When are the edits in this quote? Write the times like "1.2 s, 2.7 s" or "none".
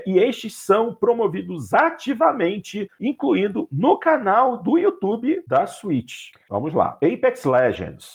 6.5 s